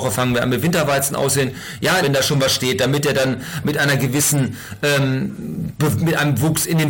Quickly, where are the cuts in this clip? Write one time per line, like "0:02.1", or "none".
0:02.0